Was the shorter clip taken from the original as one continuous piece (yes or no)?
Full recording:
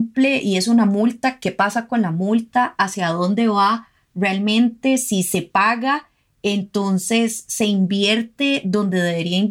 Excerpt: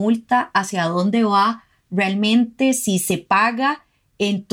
yes